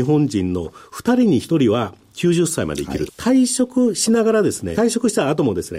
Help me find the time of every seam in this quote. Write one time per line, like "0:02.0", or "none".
0:03.1
0:04.7